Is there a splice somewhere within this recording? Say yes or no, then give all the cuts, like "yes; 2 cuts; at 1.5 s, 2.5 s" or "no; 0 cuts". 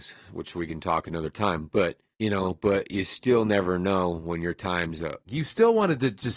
yes; 2 cuts; at 2.1 s, 5.3 s